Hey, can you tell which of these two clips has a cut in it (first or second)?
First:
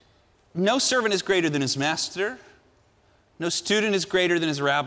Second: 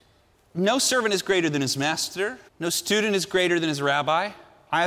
second